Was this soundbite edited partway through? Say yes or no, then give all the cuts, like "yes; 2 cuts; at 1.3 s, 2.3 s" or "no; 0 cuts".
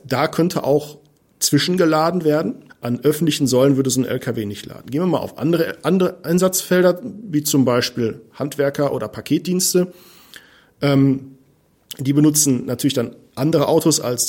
yes; 1 cut; at 2.7 s